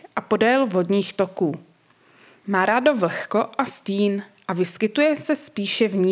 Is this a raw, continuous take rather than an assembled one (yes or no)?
yes